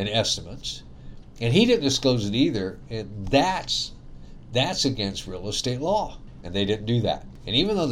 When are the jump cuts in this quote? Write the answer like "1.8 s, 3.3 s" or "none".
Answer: 6.4 s